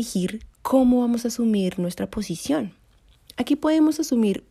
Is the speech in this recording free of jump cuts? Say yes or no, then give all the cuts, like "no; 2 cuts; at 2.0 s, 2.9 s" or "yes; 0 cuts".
yes; 0 cuts